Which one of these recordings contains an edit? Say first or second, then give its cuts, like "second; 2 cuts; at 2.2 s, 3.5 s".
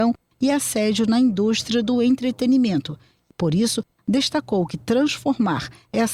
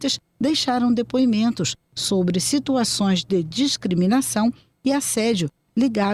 first; 1 cut; at 3.3 s